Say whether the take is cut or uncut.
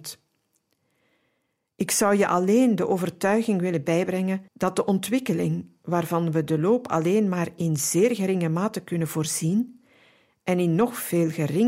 cut